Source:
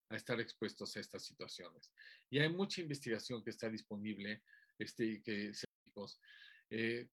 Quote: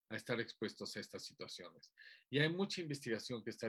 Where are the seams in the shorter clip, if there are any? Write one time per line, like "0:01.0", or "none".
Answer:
none